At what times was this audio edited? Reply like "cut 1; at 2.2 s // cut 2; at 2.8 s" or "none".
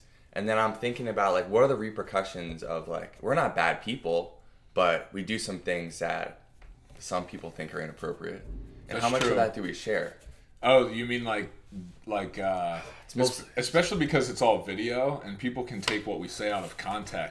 none